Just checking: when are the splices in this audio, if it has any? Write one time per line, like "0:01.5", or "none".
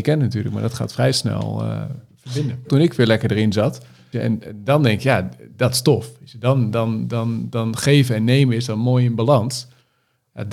0:02.6
0:04.1